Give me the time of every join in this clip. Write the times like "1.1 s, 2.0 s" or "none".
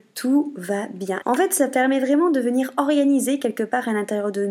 1.2 s